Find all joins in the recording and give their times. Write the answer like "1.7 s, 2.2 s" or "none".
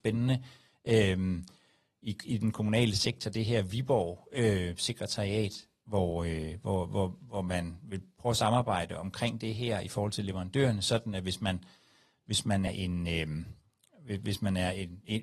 12.7 s